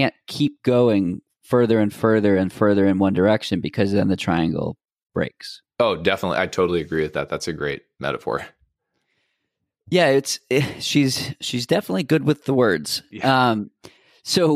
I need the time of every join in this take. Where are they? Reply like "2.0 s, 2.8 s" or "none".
none